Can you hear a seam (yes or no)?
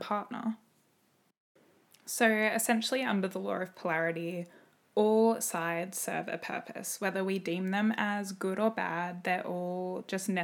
no